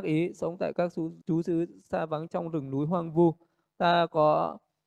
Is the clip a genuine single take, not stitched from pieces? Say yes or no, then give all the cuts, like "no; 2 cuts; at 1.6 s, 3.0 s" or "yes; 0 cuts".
no; 1 cut; at 1.2 s